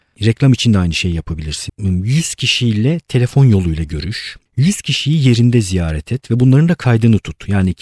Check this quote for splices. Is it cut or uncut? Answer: cut